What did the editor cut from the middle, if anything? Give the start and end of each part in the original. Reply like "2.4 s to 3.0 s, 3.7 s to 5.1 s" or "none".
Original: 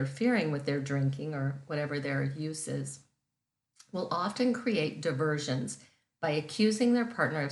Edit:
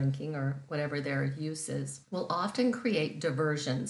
3.0 s to 3.9 s